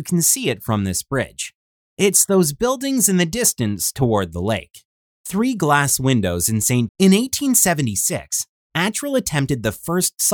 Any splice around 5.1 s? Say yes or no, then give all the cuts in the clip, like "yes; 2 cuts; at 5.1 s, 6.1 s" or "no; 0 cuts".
yes; 2 cuts; at 5.1 s, 6.9 s